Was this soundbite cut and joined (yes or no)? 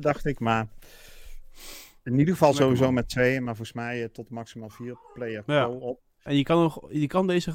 yes